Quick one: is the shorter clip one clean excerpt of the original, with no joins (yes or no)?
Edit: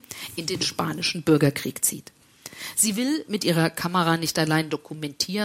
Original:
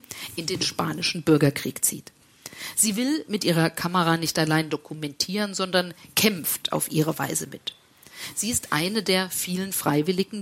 yes